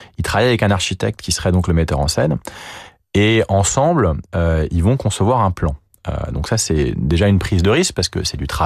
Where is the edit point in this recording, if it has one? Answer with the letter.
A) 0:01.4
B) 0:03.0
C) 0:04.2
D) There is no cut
D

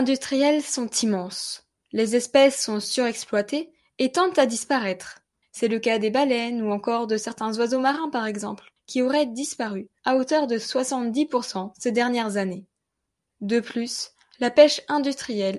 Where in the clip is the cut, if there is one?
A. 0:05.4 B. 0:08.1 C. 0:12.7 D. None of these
A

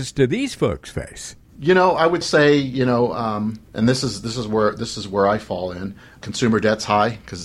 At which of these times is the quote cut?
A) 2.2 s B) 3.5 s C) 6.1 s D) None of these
A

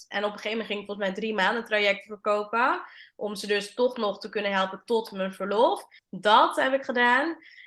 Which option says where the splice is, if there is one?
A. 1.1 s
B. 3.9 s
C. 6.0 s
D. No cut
C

